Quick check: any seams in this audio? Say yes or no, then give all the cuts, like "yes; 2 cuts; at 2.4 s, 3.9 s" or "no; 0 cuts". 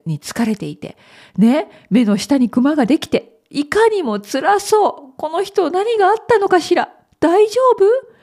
no; 0 cuts